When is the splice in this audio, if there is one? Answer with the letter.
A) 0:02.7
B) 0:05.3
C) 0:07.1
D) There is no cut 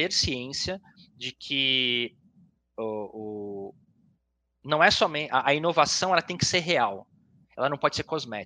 D